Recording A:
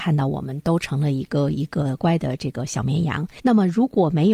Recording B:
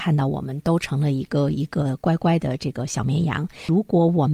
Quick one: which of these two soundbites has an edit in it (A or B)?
A